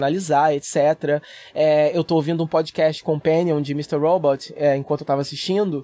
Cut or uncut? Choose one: uncut